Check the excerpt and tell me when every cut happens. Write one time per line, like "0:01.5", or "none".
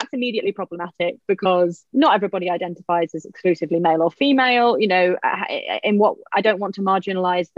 0:01.9